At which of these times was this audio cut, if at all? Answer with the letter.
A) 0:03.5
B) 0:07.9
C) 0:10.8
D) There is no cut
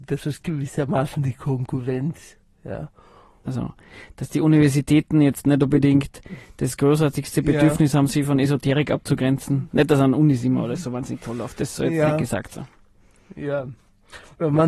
A